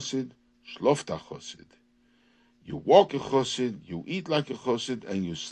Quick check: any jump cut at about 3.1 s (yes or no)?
yes